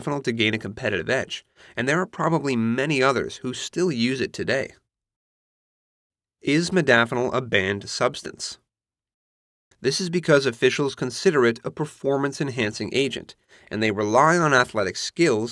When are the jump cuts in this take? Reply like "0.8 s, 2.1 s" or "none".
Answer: 9.7 s